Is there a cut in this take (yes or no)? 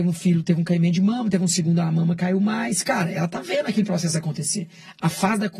no